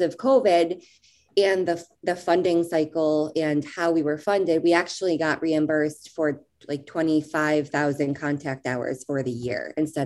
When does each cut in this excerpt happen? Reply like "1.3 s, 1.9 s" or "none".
none